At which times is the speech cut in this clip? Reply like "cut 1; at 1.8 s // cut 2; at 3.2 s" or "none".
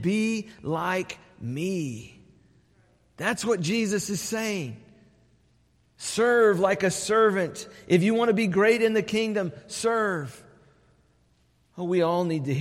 none